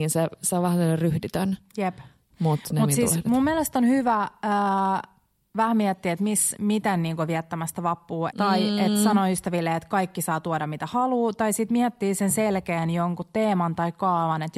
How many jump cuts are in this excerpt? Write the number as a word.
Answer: one